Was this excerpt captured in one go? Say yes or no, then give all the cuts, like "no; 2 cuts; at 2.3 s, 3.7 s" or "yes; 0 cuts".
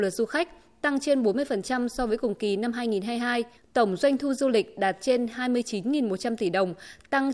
no; 1 cut; at 3.6 s